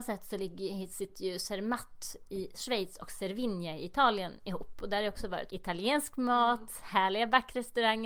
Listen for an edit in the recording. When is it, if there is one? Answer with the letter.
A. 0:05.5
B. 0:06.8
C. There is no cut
A